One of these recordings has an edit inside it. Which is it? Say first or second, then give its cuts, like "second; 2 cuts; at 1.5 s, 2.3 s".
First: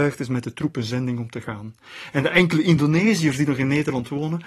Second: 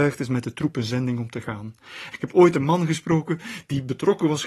second; 1 cut; at 2.1 s